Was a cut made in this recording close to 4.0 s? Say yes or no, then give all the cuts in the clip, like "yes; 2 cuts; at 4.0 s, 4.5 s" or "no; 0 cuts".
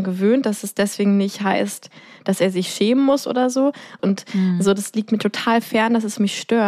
yes; 1 cut; at 4.0 s